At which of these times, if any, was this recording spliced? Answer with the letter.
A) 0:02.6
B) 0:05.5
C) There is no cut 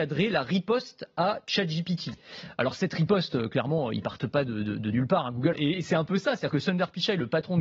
B